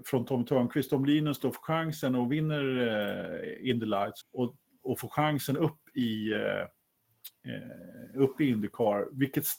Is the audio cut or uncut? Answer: cut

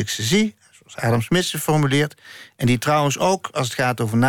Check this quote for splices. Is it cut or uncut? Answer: uncut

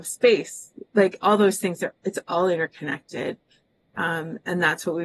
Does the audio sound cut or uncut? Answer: uncut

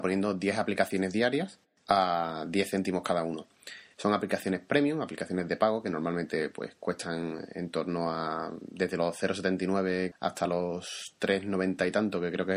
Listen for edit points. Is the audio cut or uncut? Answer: cut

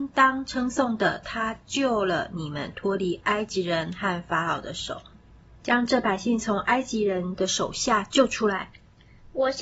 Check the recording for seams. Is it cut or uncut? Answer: uncut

